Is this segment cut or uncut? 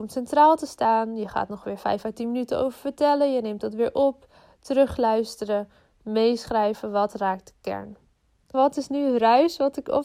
cut